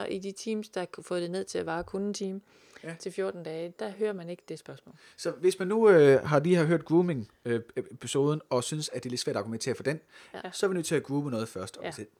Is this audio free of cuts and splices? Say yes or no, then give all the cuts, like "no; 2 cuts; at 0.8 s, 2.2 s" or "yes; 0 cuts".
no; 2 cuts; at 3.8 s, 10.4 s